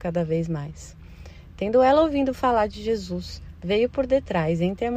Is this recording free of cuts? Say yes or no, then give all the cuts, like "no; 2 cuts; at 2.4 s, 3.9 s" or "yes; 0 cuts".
yes; 0 cuts